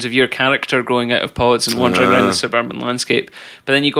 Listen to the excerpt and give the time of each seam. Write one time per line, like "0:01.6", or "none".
none